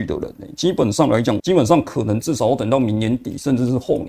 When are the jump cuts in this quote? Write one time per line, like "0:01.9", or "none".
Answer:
0:01.4